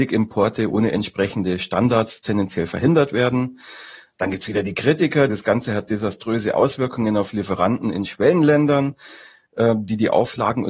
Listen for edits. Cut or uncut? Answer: cut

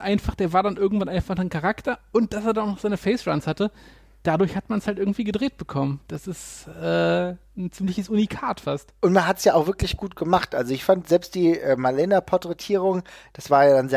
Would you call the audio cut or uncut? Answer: uncut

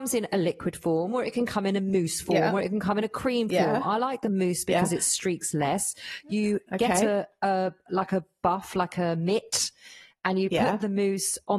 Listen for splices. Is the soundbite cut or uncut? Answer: uncut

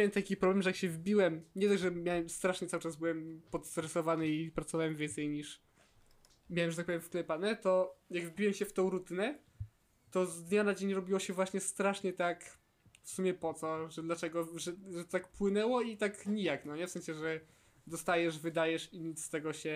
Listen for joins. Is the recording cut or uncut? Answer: uncut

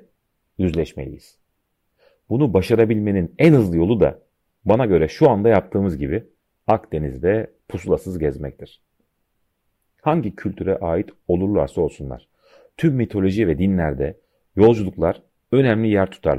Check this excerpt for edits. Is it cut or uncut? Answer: uncut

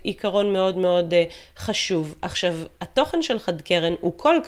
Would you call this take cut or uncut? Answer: uncut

